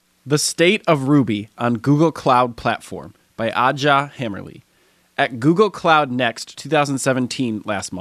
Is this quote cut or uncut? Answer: uncut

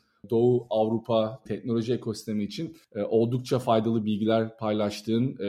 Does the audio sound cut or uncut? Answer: cut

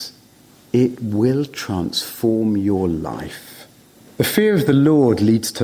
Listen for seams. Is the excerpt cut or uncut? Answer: cut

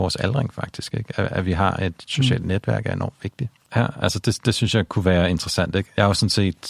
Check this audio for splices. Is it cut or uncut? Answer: cut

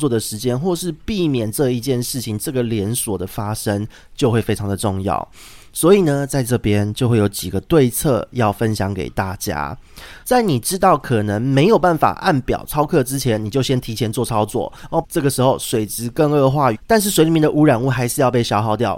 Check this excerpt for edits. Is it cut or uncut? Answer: cut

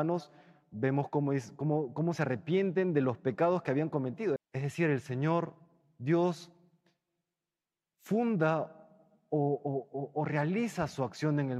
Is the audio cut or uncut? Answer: cut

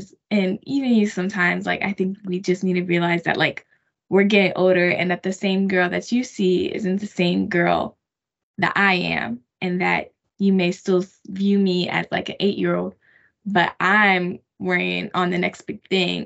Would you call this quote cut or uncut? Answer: uncut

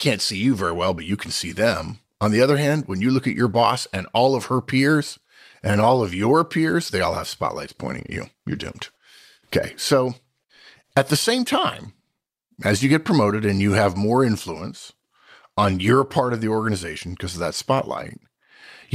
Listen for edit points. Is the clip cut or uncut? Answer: uncut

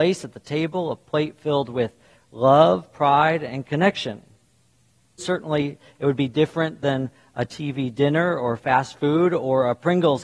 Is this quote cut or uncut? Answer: cut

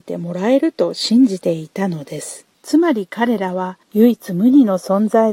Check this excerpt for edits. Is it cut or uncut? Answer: cut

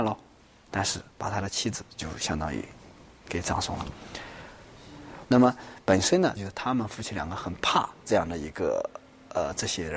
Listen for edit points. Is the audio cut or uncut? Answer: cut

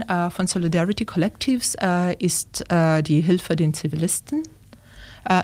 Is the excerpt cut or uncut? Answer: uncut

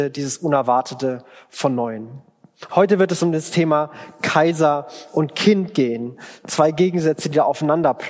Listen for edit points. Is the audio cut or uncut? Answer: cut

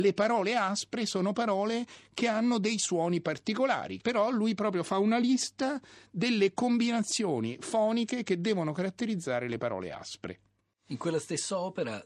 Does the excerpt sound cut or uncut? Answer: uncut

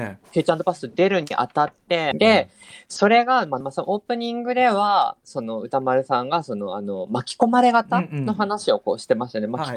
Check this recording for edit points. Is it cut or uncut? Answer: cut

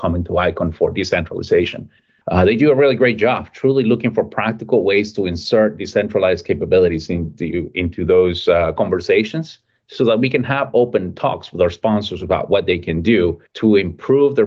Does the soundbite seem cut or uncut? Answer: uncut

